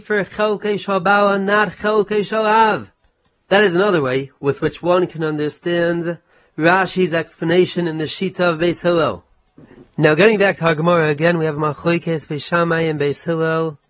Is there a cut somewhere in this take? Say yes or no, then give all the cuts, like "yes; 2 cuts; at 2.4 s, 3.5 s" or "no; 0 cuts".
no; 0 cuts